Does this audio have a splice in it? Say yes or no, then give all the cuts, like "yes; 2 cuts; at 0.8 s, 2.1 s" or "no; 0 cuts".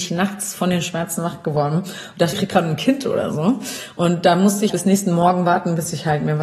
yes; 2 cuts; at 2.3 s, 4.7 s